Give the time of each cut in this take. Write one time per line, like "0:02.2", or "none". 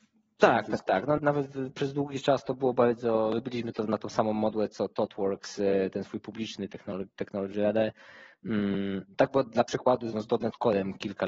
0:01.2
0:09.1